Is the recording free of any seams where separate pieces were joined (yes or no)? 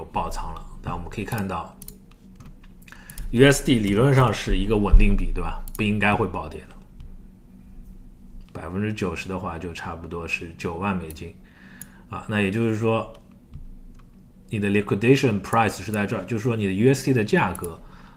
no